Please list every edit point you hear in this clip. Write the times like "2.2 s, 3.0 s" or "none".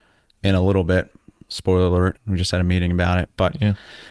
2.2 s